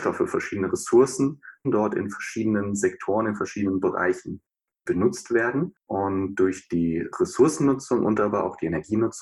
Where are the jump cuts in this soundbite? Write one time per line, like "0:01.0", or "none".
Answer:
0:01.6
0:05.8